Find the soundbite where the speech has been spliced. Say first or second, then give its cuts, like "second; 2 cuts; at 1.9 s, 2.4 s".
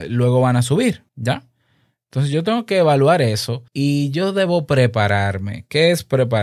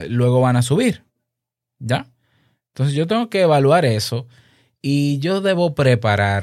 first; 2 cuts; at 1.1 s, 3.7 s